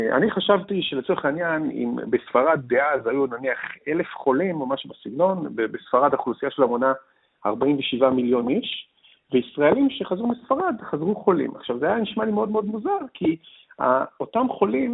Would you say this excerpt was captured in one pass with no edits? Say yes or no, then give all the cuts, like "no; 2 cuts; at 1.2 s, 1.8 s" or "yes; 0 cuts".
yes; 0 cuts